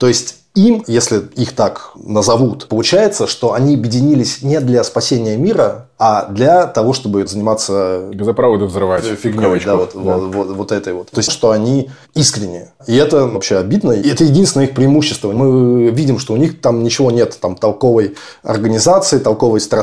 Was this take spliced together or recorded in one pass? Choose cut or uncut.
cut